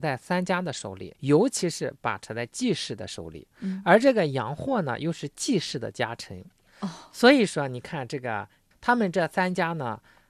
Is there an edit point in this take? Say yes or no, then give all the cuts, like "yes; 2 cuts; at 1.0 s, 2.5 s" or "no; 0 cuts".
yes; 3 cuts; at 1.1 s, 6.7 s, 8.7 s